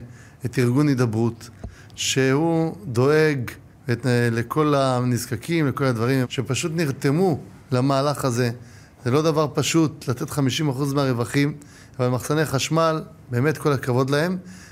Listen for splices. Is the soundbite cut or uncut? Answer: cut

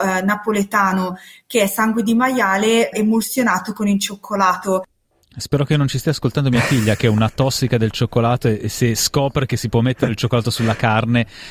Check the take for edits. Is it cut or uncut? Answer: uncut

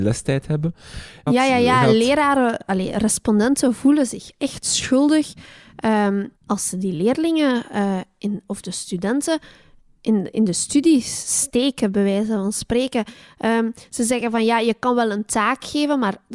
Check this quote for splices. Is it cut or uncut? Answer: cut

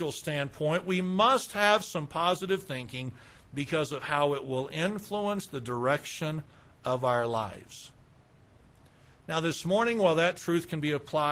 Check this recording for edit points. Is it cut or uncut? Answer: uncut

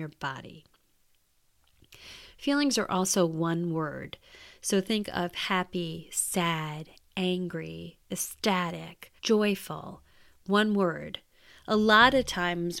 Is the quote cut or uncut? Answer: cut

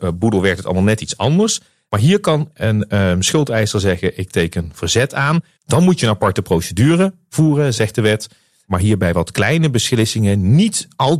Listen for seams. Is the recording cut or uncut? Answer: cut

